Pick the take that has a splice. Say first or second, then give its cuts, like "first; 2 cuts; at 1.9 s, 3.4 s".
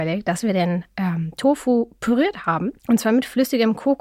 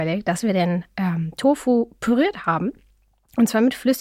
first; 1 cut; at 2.8 s